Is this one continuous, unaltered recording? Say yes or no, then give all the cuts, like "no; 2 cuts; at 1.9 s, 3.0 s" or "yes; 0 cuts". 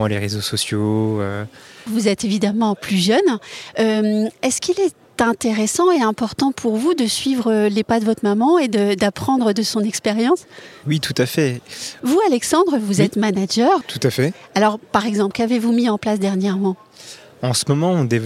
no; 3 cuts; at 1.9 s, 12.0 s, 13.8 s